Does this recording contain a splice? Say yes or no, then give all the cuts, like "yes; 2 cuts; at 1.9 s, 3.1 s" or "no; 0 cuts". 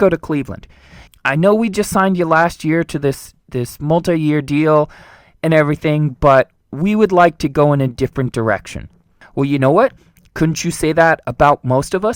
yes; 2 cuts; at 1.1 s, 9.2 s